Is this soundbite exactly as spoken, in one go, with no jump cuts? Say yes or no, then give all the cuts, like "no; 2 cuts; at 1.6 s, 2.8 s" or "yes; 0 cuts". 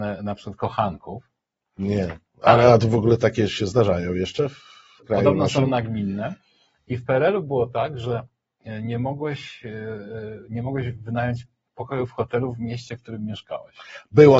yes; 0 cuts